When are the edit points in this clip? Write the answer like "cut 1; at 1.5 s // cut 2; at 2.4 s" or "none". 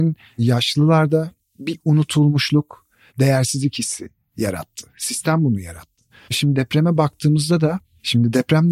cut 1; at 3.1 s